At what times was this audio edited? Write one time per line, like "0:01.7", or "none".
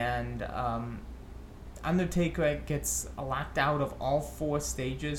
none